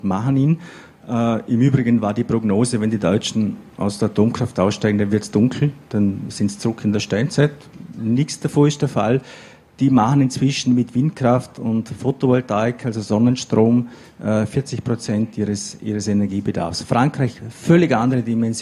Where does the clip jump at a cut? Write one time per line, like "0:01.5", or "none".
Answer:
none

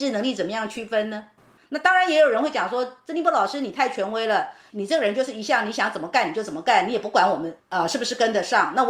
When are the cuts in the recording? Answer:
0:01.6

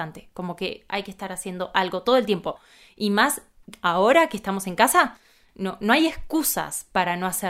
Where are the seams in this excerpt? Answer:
none

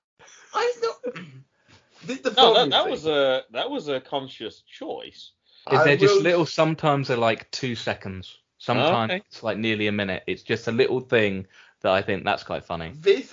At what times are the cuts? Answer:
0:05.6

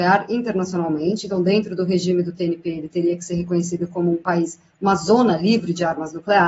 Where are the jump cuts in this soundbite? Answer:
none

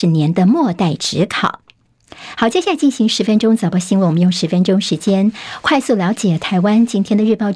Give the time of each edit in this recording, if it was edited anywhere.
none

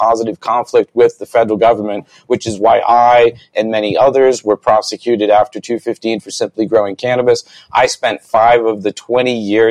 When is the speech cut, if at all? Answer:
none

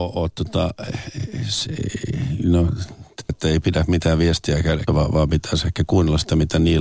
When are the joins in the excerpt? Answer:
0:03.3
0:04.9

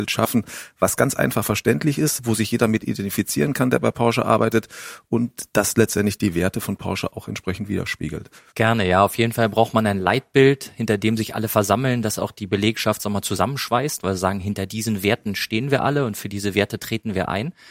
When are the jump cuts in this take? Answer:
0:08.5

